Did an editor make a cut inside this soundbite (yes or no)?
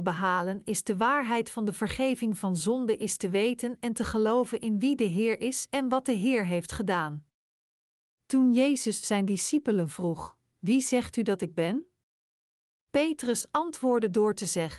no